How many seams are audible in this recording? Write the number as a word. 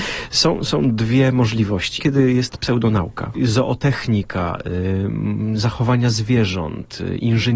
two